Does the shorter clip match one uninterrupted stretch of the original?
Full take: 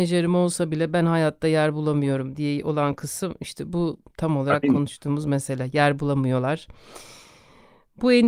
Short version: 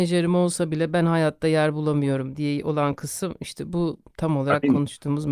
yes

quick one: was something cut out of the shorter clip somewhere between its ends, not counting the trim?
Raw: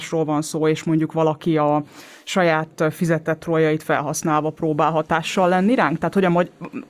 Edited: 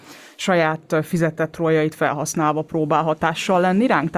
no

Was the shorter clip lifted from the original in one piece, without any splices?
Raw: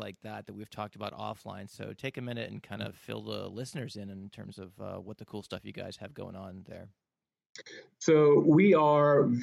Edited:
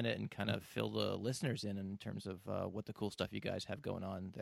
yes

